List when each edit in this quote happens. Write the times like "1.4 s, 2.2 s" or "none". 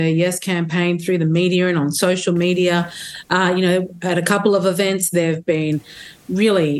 none